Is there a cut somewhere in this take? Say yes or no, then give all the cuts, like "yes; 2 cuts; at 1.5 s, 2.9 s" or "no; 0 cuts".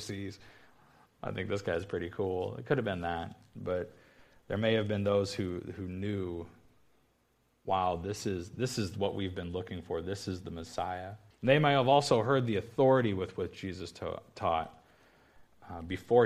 yes; 1 cut; at 11.3 s